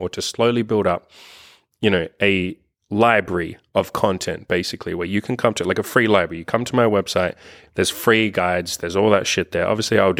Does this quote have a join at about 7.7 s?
yes; 2 cuts; at 7.7 s, 8.8 s

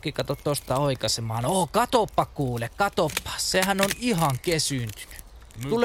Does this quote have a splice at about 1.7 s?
no; 0 cuts

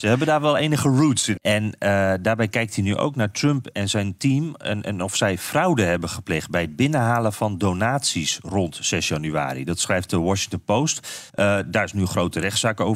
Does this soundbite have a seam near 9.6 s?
no; 2 cuts; at 1.4 s, 11.3 s

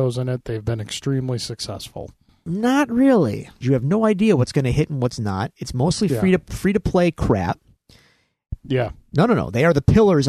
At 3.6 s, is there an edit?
yes; 2 cuts; at 3.6 s, 8.6 s

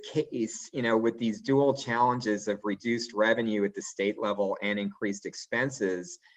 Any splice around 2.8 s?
no; 0 cuts

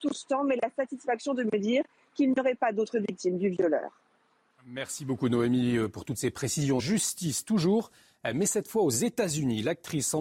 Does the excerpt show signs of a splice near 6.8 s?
yes; 1 cut; at 6.8 s

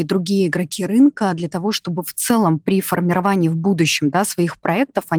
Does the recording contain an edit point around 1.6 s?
no; 0 cuts

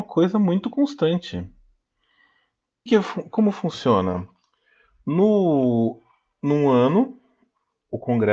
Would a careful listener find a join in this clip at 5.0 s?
no; 1 cut; at 2.9 s

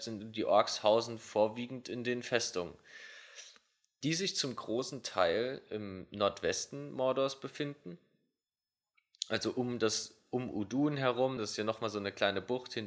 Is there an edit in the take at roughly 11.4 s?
no; 0 cuts

